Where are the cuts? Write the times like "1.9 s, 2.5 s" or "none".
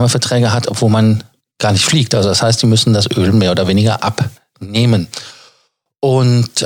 none